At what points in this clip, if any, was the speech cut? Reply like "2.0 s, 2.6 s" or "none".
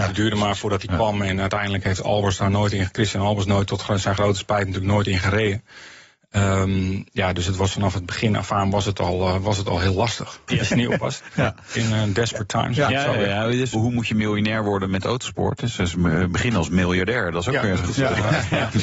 10.5 s, 13.7 s